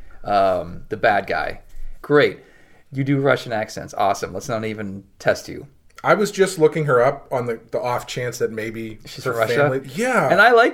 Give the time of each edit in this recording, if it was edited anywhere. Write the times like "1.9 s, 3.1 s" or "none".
2.0 s, 9.8 s